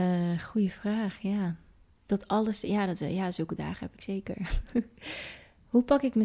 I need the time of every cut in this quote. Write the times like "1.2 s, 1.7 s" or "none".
none